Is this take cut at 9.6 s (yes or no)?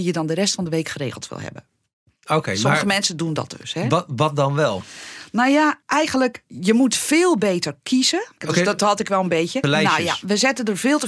yes